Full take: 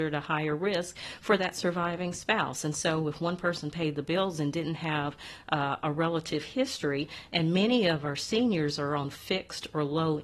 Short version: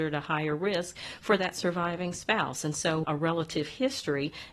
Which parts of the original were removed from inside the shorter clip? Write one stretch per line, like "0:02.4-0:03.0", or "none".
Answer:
0:03.0-0:05.8